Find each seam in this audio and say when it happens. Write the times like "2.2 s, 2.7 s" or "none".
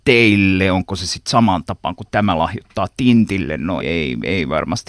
3.8 s